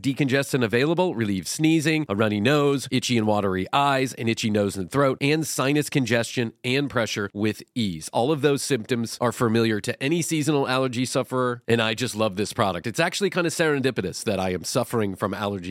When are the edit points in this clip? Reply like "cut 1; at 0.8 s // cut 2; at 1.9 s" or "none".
none